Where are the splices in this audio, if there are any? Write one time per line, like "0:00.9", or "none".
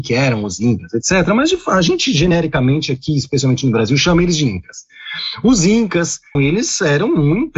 0:06.4